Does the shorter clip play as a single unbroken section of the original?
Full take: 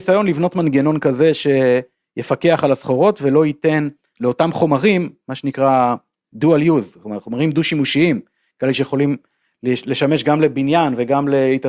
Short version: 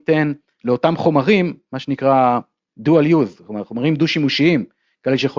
yes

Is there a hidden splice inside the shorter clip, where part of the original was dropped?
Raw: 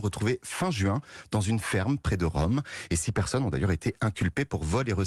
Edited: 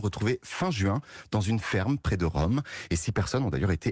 no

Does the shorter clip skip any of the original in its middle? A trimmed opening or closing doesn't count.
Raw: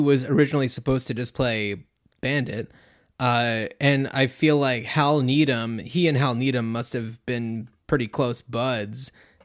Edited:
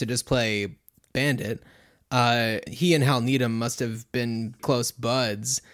yes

